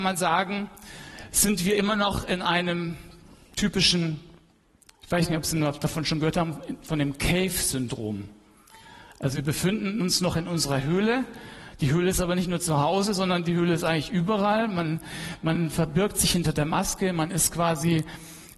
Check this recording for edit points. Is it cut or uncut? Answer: uncut